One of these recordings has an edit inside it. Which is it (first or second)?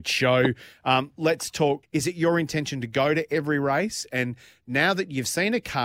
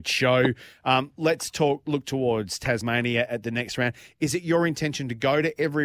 first